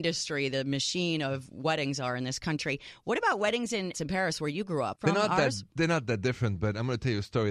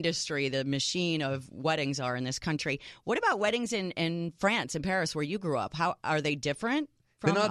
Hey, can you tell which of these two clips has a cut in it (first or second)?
first